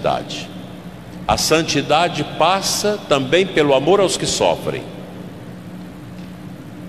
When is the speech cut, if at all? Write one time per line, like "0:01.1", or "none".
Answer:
0:01.3